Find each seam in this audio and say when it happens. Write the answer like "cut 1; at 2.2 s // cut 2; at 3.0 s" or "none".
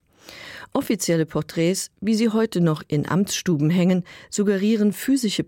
none